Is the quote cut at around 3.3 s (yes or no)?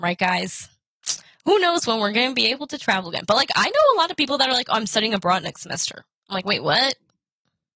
no